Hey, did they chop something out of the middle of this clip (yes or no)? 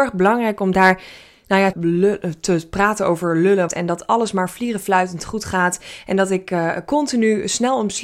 yes